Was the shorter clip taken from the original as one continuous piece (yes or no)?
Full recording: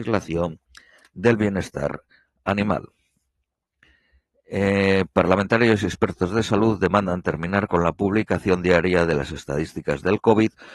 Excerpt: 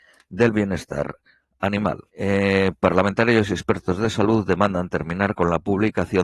no